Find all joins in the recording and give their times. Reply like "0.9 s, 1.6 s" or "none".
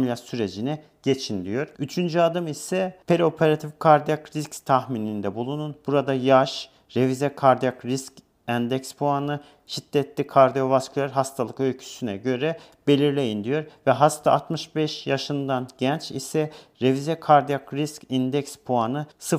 none